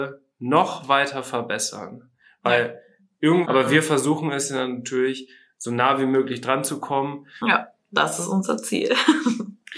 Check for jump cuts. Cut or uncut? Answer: cut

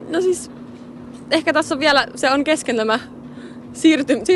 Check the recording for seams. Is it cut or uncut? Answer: uncut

